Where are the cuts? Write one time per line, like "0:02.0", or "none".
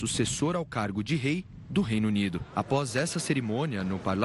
none